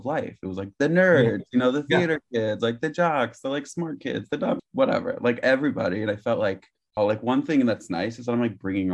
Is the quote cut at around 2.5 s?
no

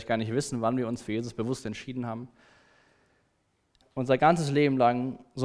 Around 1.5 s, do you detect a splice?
no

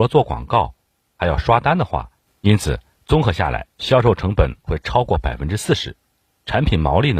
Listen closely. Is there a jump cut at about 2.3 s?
yes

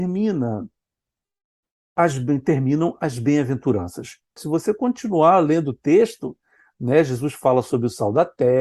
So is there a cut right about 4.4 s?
yes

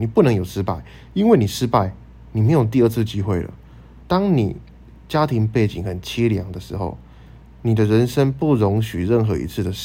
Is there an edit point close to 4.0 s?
yes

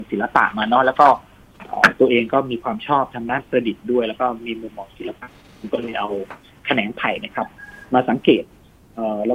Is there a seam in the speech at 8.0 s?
no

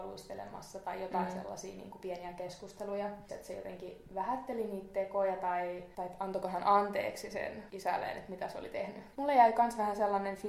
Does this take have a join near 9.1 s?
yes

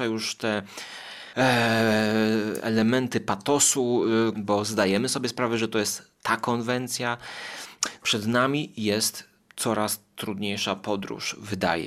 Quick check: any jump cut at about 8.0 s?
yes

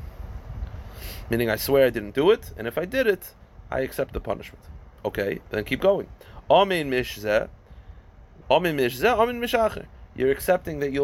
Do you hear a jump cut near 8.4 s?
yes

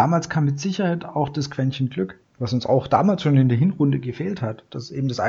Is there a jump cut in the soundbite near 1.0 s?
no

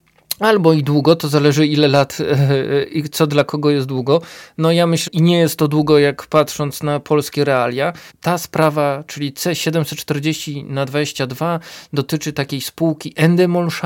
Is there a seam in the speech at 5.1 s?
yes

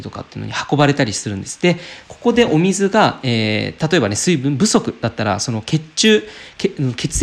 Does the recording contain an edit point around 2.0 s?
no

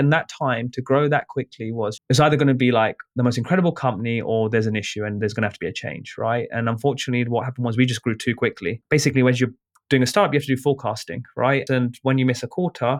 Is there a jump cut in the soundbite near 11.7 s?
yes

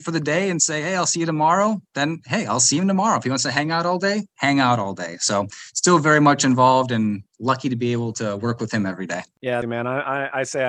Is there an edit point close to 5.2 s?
no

